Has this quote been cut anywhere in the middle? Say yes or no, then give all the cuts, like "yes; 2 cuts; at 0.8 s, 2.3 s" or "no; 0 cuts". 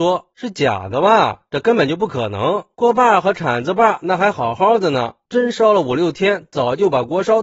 no; 0 cuts